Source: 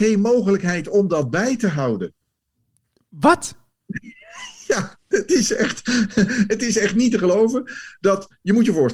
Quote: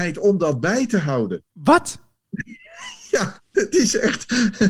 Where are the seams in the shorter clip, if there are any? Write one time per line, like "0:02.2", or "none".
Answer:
0:01.5